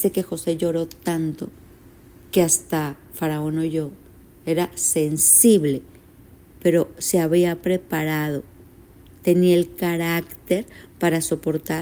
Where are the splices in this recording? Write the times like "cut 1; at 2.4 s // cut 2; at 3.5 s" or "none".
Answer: none